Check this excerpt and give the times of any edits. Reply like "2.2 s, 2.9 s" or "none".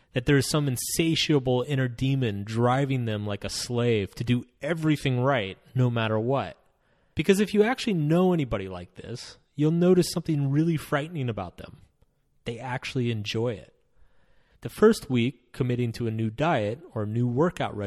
7.1 s, 14.5 s